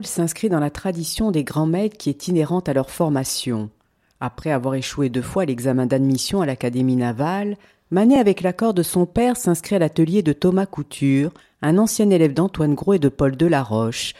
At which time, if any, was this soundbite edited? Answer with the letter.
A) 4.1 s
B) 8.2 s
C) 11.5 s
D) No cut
D